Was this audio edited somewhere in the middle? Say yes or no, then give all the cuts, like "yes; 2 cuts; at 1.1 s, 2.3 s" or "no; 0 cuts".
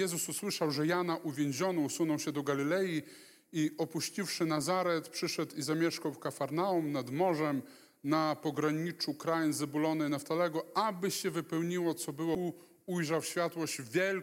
no; 0 cuts